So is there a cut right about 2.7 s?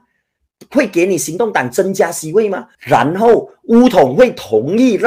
yes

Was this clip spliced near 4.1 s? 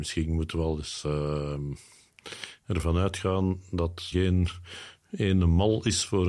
yes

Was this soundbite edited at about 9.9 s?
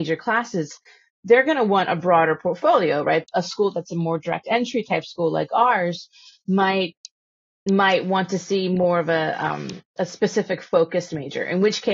yes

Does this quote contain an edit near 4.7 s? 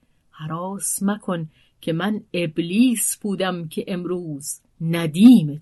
yes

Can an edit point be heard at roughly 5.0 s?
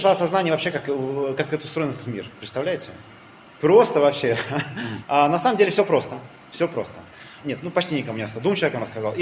yes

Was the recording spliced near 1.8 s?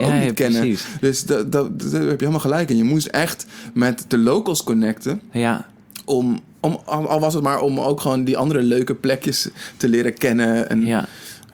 yes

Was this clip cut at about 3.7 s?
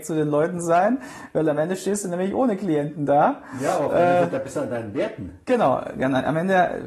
no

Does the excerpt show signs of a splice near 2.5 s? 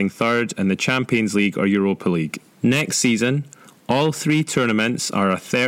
yes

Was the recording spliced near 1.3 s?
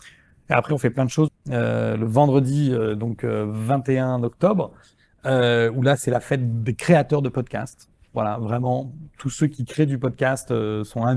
yes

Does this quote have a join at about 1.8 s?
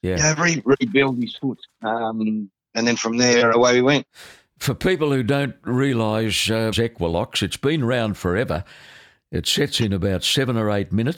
no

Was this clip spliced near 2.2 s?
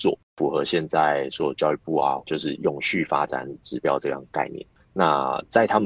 yes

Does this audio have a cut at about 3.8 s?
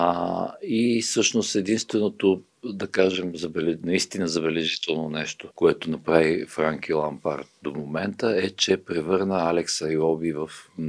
no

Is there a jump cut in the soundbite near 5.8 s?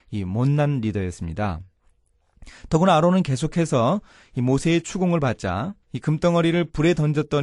yes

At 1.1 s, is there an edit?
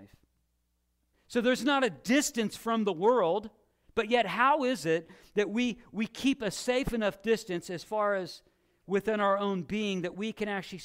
yes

